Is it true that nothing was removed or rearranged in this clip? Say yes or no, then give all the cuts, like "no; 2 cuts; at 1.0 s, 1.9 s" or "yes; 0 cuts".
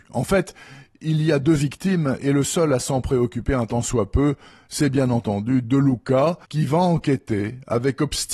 no; 1 cut; at 6.4 s